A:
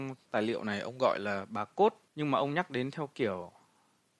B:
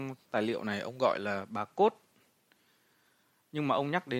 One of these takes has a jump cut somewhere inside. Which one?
A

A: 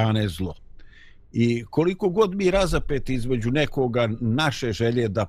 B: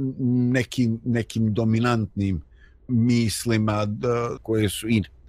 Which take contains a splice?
B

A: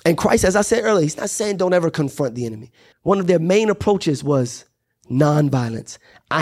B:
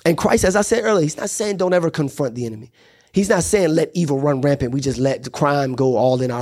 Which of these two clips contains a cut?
A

